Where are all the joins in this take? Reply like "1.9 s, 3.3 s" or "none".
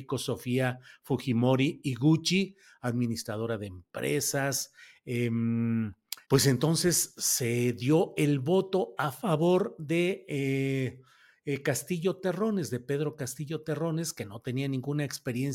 6.2 s